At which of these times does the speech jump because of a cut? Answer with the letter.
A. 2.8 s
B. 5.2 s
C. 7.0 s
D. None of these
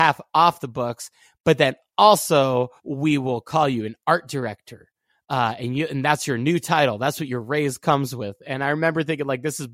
A